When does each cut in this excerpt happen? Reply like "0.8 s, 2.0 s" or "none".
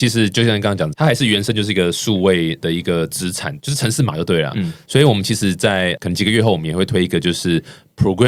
4.9 s